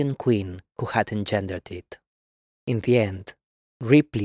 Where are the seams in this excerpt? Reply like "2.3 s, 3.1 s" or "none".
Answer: 2.6 s